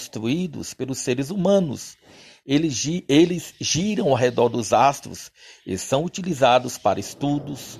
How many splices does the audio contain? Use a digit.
0